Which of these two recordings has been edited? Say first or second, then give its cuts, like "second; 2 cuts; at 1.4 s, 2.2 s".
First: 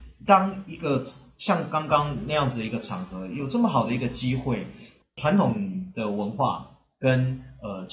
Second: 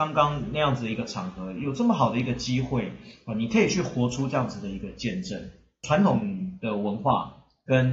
first; 1 cut; at 5.0 s